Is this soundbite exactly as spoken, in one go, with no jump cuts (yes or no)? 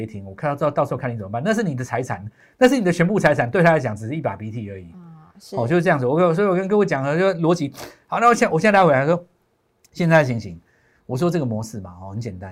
yes